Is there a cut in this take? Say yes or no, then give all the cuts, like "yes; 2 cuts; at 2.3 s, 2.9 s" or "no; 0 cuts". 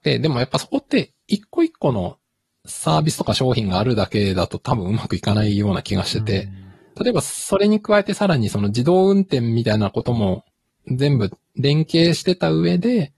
no; 0 cuts